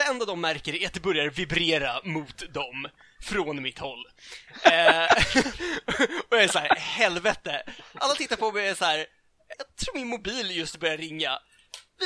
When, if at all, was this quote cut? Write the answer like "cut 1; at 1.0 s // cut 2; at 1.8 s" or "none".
cut 1; at 9.5 s